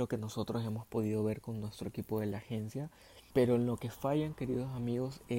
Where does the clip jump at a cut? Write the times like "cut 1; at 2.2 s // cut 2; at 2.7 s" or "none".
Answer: cut 1; at 3.3 s